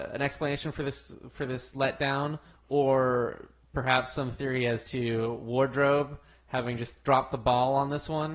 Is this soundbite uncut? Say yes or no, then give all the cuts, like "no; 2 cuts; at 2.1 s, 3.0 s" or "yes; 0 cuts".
yes; 0 cuts